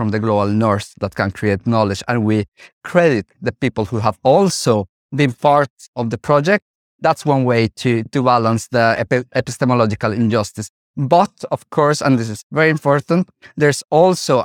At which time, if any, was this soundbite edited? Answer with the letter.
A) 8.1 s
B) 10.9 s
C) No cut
A